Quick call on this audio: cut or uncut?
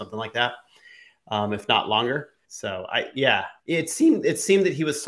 cut